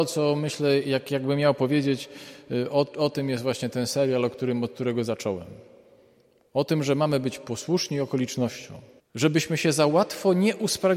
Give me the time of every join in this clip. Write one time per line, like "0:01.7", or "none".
0:09.0